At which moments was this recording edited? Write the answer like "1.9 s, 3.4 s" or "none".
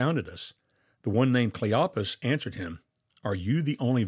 1.0 s